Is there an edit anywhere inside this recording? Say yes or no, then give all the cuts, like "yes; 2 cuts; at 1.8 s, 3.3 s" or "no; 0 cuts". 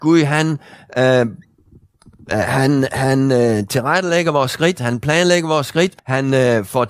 yes; 1 cut; at 6.0 s